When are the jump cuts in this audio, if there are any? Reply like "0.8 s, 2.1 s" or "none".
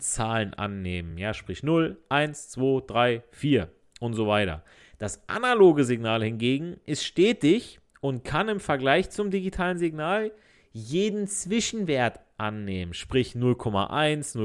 none

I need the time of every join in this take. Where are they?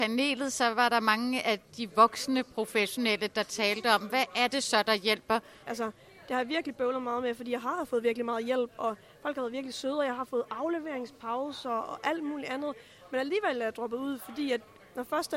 5.6 s

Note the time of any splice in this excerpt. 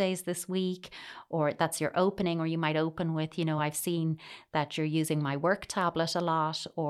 none

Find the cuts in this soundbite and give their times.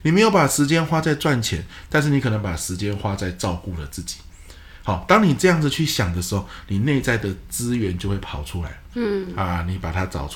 8.9 s

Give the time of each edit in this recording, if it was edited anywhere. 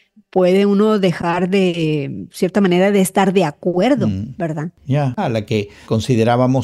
5.2 s

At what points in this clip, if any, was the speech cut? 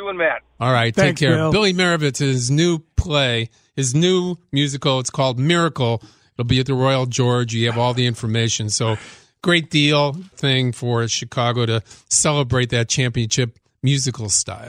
10.3 s

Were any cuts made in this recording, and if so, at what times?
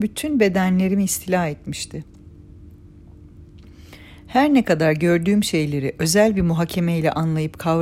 none

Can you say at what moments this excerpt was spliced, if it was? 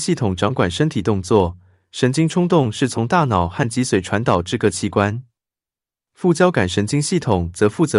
none

